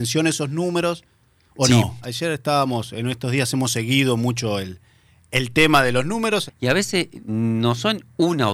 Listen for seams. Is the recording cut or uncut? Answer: cut